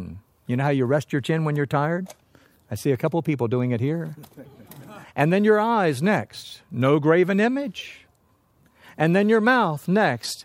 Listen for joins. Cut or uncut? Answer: cut